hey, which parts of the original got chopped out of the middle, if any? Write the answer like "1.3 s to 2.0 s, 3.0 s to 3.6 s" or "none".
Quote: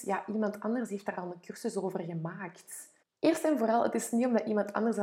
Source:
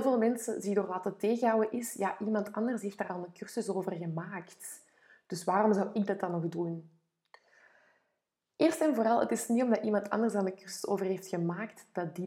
4.9 s to 8.4 s